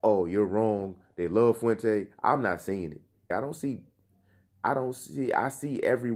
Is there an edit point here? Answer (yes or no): yes